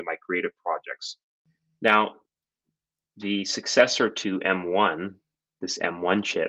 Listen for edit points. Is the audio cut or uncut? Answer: uncut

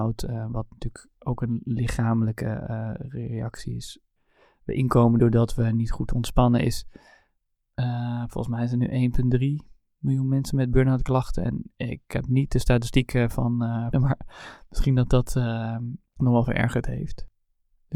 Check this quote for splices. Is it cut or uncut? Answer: cut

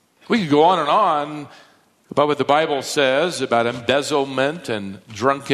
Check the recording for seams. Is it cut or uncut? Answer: uncut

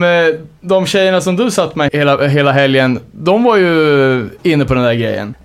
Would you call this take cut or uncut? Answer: cut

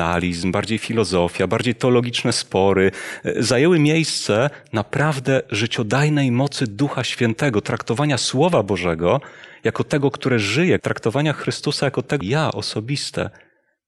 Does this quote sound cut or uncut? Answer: cut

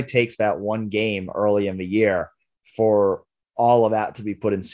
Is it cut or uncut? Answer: uncut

